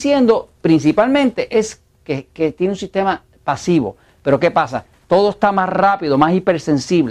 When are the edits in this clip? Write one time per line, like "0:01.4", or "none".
0:04.9